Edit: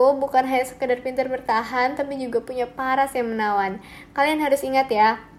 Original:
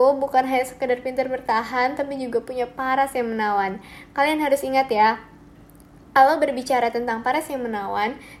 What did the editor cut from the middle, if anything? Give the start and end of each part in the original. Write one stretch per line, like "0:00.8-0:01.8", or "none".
none

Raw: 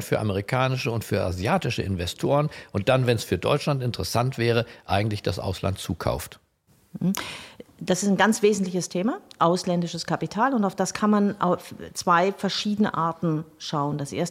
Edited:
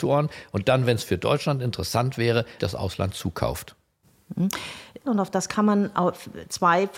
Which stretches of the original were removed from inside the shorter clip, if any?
0:04.8-0:05.2
0:07.7-0:10.5

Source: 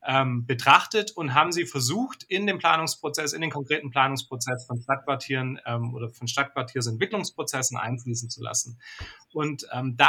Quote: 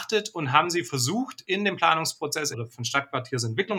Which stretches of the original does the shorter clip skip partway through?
0:03.3-0:05.9

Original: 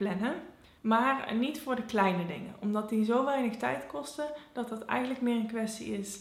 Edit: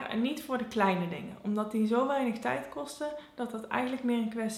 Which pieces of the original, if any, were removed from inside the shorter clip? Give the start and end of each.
none

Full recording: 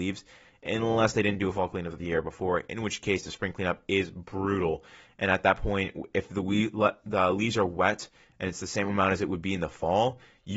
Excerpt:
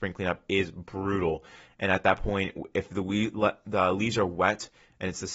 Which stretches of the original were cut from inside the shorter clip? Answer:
none

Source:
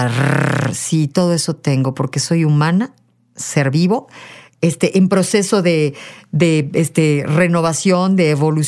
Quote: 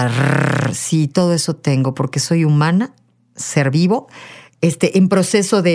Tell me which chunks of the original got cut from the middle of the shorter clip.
none

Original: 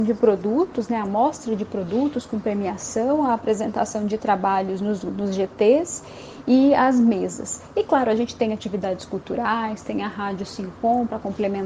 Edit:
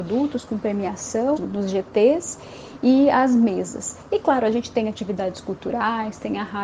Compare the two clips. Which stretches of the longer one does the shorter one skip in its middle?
0:03.2-0:05.0

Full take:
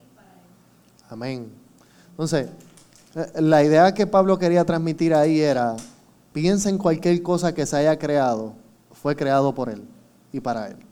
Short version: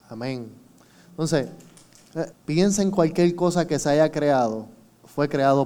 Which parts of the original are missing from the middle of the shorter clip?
0:03.3-0:06.2

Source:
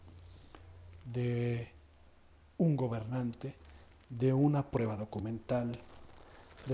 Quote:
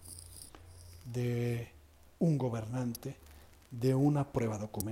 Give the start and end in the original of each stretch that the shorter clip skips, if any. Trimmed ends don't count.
0:02.2-0:02.5

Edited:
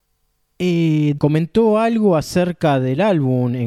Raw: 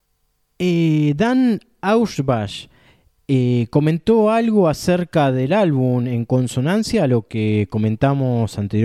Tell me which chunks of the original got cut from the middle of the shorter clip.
0:01.2-0:03.7

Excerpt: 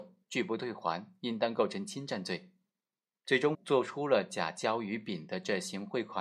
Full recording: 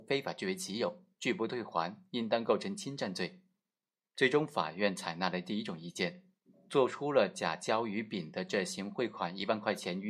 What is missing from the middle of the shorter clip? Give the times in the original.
0:04.4-0:06.6

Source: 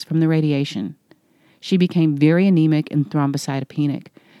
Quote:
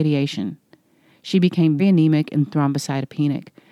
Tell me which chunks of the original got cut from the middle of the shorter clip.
0:02.2-0:02.4

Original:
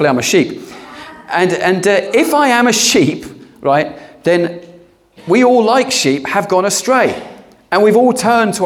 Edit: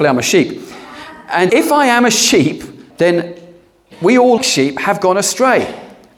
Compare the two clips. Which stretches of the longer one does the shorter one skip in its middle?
0:01.5-0:02.1
0:03.5-0:04.2
0:05.6-0:05.9

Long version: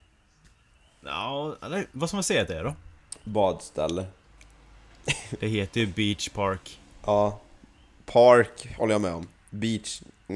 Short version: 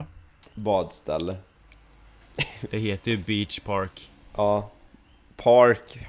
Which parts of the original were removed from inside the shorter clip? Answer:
none

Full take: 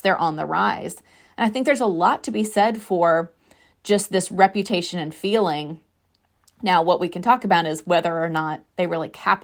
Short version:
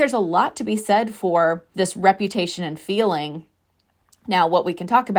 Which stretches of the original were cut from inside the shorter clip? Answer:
0:03.4-0:04.1

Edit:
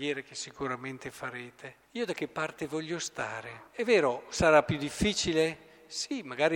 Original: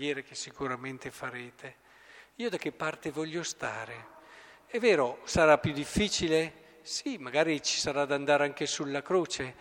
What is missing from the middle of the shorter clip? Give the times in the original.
0:01.8-0:02.3
0:04.1-0:04.6

